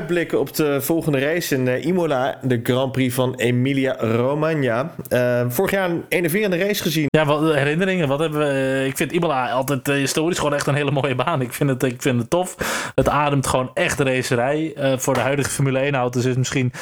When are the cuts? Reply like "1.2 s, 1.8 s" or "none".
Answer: 7.1 s